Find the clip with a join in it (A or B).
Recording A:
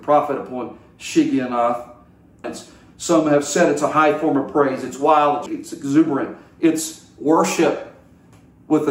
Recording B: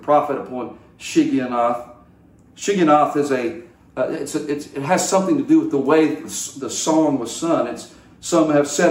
A